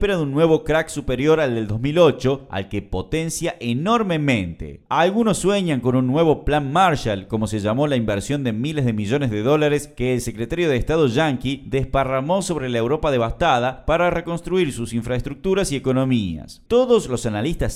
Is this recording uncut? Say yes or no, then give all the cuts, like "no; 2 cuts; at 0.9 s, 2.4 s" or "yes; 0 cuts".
no; 2 cuts; at 4.8 s, 16.7 s